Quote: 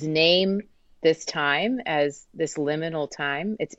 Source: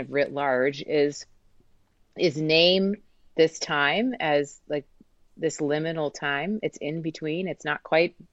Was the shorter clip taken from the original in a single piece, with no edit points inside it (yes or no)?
no